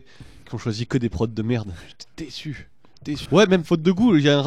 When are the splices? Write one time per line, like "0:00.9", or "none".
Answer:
0:03.3

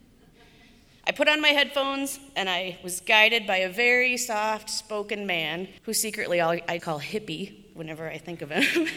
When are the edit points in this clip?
0:05.8
0:06.8

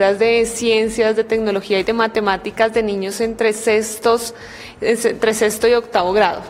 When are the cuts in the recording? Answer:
none

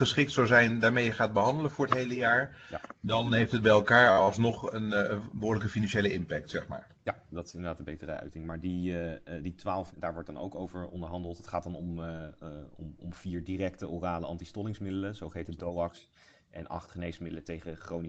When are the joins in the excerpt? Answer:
0:09.9

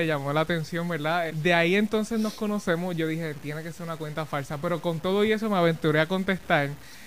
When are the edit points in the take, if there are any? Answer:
0:01.3

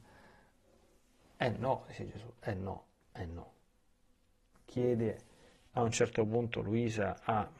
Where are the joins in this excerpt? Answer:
0:04.5

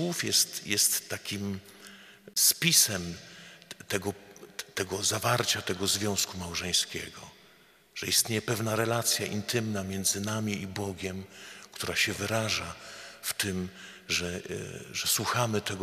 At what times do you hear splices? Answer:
none

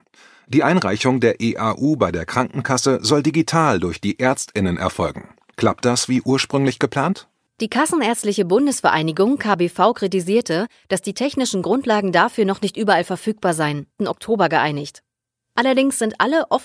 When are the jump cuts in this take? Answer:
0:07.5
0:14.0

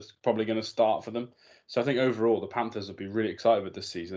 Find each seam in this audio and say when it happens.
none

